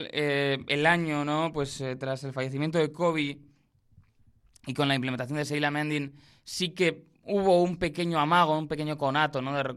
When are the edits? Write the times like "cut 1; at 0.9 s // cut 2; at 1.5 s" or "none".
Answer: none